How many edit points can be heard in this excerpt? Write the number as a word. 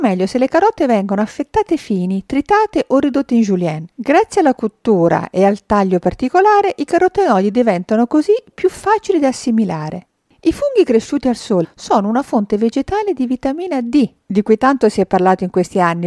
two